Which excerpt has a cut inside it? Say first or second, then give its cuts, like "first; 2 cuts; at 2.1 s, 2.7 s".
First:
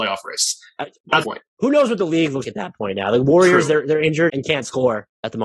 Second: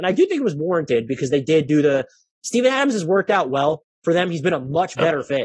first; 3 cuts; at 1.2 s, 2.4 s, 4.3 s